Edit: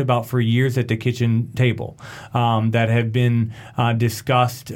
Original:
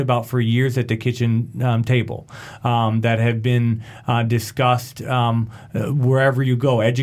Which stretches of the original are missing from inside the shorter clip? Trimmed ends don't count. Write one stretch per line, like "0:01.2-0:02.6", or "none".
0:01.6-0:01.9